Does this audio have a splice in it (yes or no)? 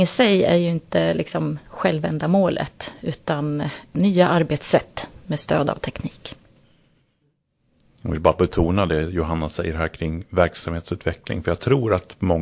no